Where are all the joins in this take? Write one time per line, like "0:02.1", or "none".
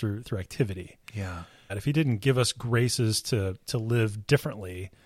0:01.7